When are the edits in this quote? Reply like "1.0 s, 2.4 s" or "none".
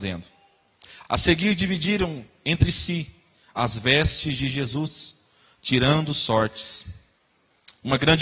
none